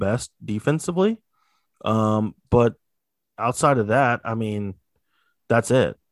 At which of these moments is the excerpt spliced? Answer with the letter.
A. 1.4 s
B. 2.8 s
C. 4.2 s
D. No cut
D